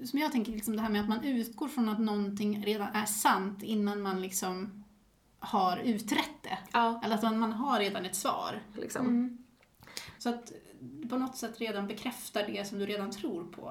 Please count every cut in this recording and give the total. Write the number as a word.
two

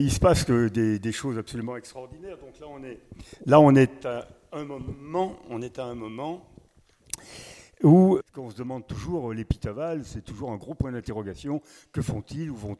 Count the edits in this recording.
one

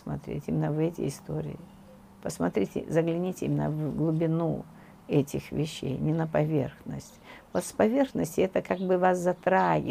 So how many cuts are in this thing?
zero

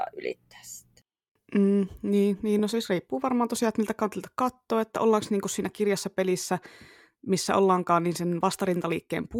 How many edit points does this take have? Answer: zero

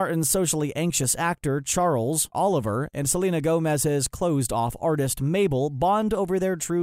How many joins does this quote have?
one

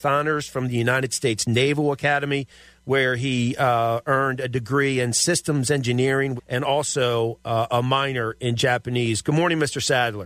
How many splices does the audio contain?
one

